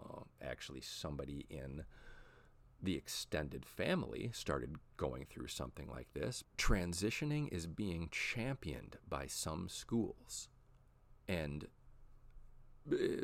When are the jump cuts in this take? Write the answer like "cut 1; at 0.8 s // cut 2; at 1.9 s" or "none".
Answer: cut 1; at 6.4 s